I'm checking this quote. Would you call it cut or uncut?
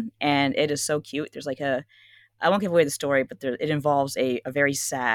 uncut